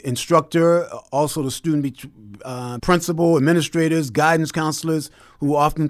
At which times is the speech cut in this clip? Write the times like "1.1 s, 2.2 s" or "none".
2.8 s